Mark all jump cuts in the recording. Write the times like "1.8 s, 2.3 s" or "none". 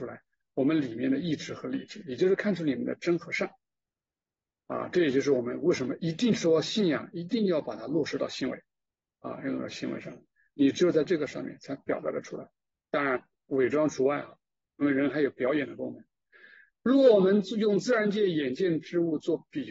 none